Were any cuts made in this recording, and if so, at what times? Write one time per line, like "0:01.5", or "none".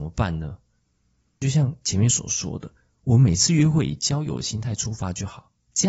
none